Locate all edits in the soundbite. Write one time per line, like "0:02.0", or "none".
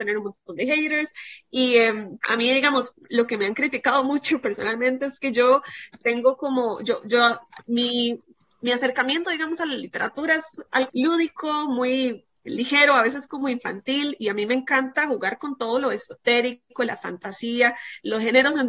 0:02.2
0:10.9